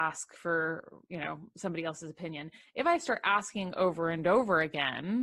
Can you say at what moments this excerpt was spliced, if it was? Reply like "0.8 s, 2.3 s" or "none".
none